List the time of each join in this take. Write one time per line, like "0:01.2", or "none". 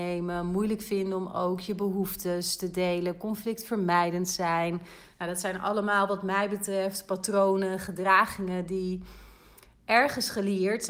none

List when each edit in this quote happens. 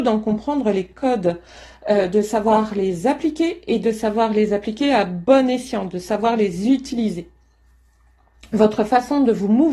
none

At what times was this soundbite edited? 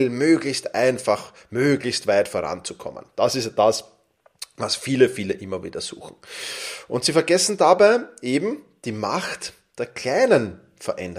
none

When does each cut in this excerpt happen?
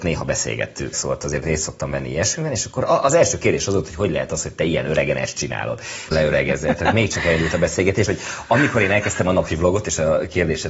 0:00.9
0:06.1
0:08.1

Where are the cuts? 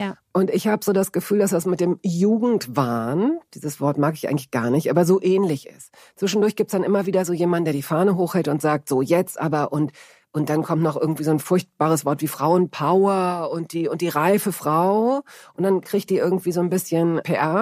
0:15.8

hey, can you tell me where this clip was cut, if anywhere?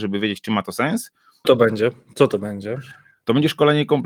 0:01.4

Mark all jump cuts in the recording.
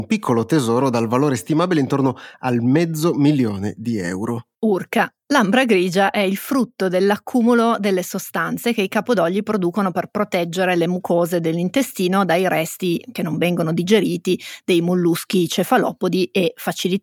0:04.5

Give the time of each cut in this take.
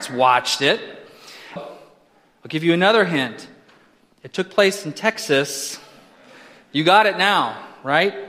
0:01.6

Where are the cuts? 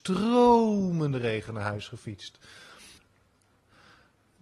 0:03.0

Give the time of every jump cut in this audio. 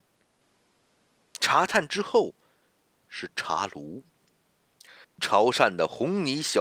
0:05.0

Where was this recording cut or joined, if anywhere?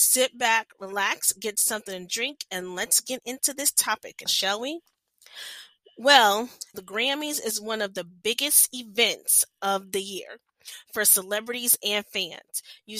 0:04.3
0:06.7

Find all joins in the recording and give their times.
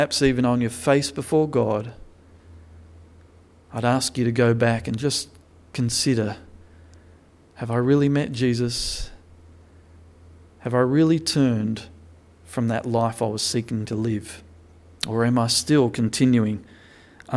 none

